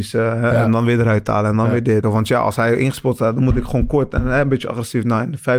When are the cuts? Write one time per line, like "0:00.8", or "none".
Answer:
0:02.0